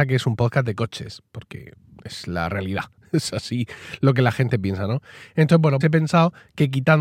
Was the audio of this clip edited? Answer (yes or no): yes